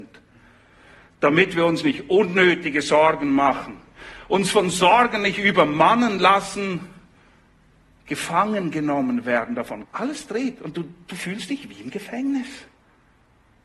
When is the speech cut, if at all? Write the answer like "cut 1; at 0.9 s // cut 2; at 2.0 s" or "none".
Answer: cut 1; at 9.8 s